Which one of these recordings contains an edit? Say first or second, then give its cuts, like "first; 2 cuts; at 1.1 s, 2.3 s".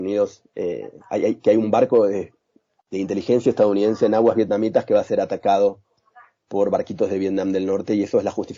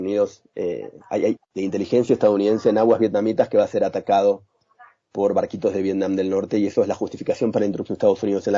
second; 1 cut; at 1.4 s